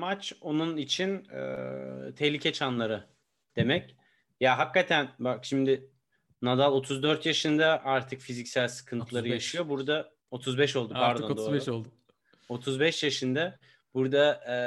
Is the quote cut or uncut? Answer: cut